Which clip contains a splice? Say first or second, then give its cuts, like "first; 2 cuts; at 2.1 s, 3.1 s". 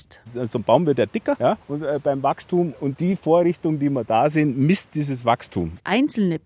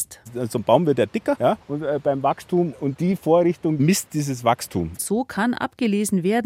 second; 2 cuts; at 3.8 s, 5.0 s